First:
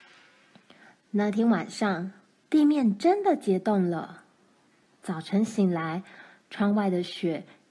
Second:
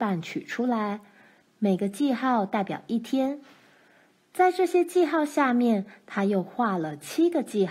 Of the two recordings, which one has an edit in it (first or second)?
second